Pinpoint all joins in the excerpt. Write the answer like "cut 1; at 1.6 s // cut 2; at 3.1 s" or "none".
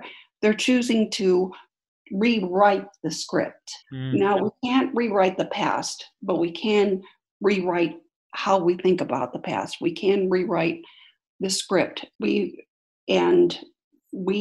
cut 1; at 3.8 s // cut 2; at 12.1 s